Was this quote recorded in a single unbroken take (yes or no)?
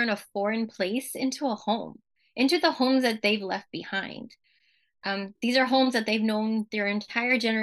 yes